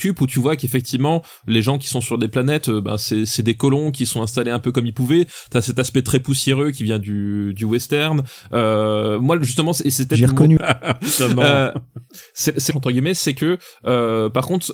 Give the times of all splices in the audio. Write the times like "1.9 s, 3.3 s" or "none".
10.6 s, 12.7 s